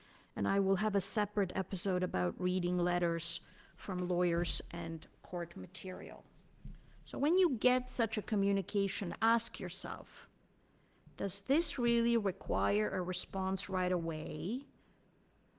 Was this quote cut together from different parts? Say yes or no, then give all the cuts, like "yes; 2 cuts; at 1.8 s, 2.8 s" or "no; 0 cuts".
no; 0 cuts